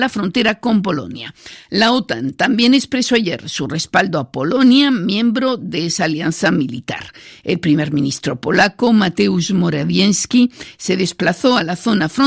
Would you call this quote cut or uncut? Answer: uncut